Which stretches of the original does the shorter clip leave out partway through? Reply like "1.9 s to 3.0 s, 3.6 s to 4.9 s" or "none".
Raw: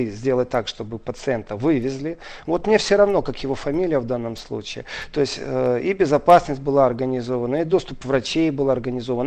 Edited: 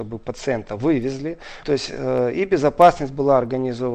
2.4 s to 5.1 s